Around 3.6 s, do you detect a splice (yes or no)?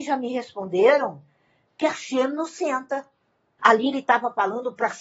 yes